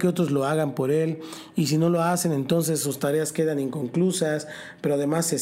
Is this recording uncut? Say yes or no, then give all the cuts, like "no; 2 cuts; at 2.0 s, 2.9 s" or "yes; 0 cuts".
yes; 0 cuts